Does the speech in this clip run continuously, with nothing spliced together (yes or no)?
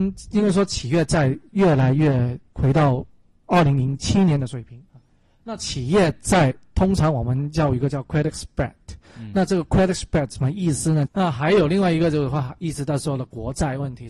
no